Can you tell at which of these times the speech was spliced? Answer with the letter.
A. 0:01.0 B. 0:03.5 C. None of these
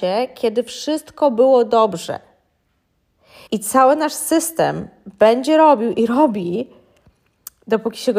B